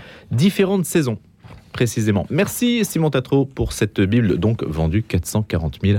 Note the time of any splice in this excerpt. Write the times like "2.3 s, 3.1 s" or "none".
none